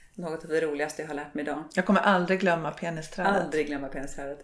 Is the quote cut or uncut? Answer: uncut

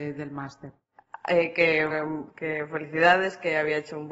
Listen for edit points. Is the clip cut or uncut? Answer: cut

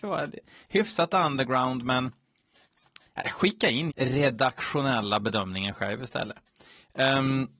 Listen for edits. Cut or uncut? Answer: cut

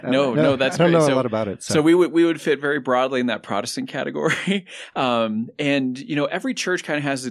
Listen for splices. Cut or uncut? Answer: uncut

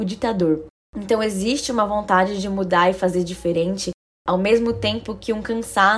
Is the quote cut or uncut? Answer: uncut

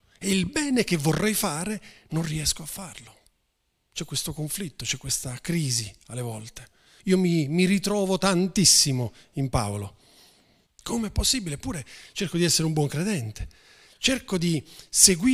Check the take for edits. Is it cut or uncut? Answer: cut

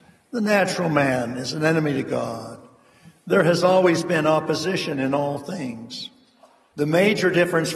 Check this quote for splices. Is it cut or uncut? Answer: uncut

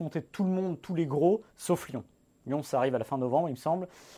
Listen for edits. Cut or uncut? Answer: uncut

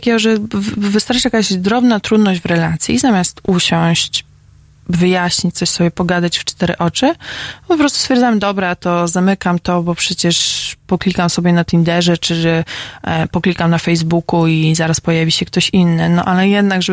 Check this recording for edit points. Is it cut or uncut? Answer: uncut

